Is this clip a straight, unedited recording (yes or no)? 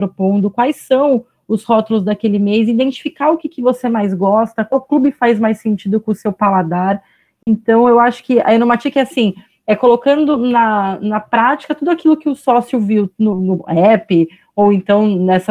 yes